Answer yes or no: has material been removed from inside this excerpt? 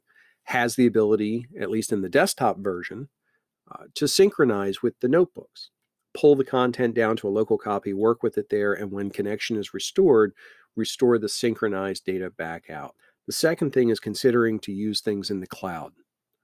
yes